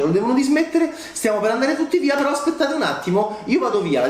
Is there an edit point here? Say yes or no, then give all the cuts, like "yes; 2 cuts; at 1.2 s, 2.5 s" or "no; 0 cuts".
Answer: no; 0 cuts